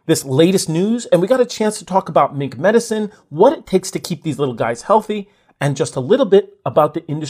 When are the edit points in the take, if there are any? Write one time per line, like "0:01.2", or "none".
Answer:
none